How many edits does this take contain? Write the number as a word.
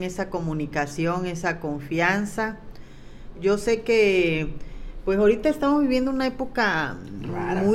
one